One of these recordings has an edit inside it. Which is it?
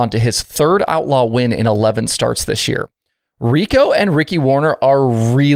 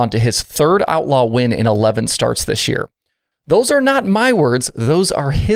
second; 1 cut; at 3.3 s

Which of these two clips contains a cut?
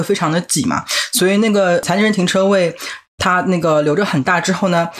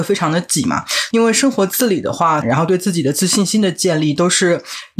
second; 2 cuts; at 1.1 s, 2.4 s

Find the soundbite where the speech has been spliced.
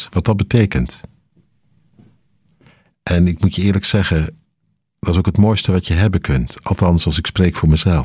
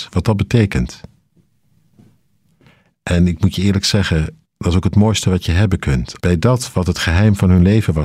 second; 2 cuts; at 4.5 s, 6.2 s

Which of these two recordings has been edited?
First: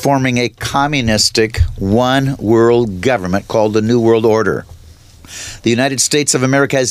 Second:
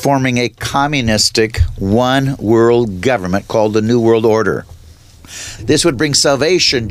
second; 1 cut; at 5.6 s

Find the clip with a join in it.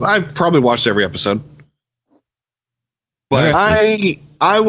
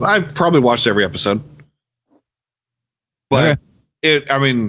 first; 1 cut; at 3.5 s

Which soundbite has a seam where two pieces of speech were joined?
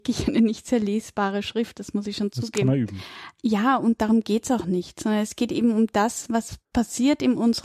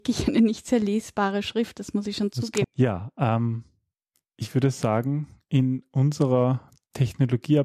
second; 1 cut; at 2.6 s

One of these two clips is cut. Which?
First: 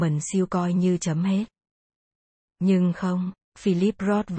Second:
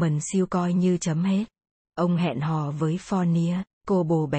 second; 1 cut; at 1.8 s

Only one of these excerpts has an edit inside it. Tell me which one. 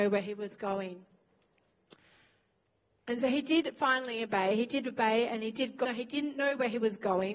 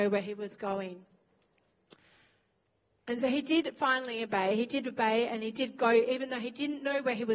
first; 1 cut; at 5.8 s

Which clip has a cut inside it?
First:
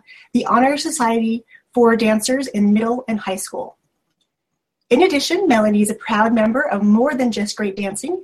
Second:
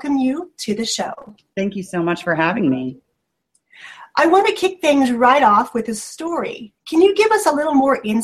second; 1 cut; at 6.8 s

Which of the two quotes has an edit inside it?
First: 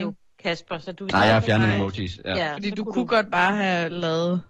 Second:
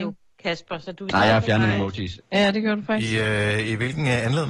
second; 1 cut; at 2.2 s

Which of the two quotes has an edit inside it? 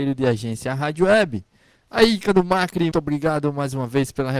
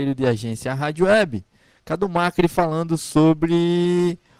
first; 2 cuts; at 1.8 s, 2.9 s

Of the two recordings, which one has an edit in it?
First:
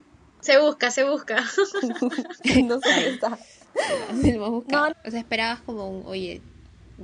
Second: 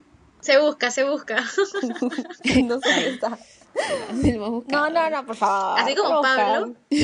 first; 1 cut; at 4.9 s

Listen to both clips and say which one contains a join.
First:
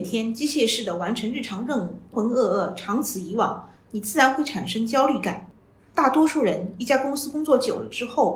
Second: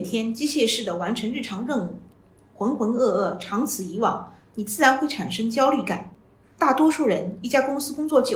first; 1 cut; at 2.1 s

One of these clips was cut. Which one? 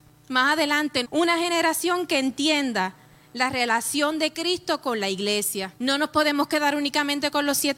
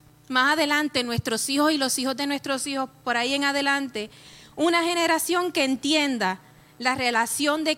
first; 2 cuts; at 1.0 s, 5.8 s

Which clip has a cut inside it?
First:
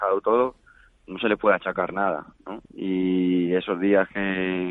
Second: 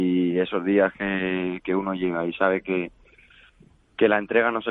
first; 1 cut; at 2.7 s

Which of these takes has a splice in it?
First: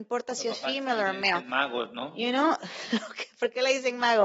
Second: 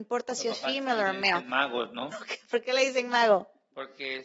second; 1 cut; at 2.1 s

